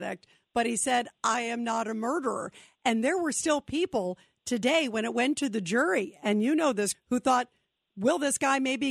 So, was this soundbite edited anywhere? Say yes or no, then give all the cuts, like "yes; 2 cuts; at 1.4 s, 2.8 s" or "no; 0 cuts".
yes; 1 cut; at 6.9 s